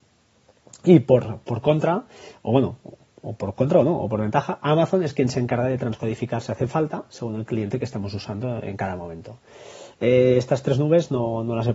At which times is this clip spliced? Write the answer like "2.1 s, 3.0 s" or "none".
10.0 s